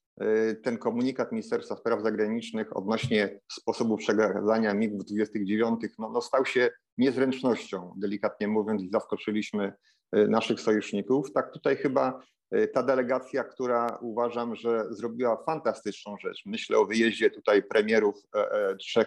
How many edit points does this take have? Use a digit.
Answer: 0